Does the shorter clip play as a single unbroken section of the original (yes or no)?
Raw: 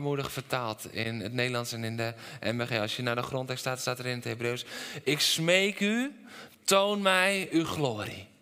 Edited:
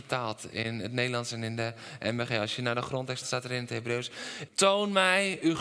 no